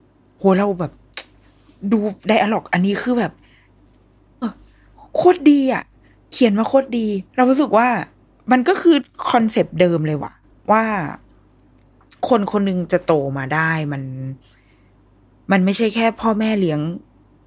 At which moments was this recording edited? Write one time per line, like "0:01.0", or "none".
0:04.4
0:07.3
0:12.2